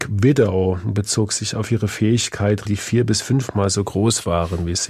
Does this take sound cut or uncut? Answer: cut